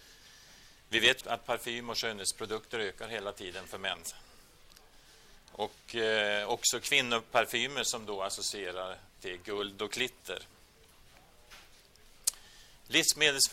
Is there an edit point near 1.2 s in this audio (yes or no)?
yes